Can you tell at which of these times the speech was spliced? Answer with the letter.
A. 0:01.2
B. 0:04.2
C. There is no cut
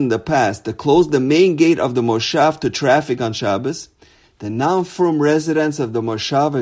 B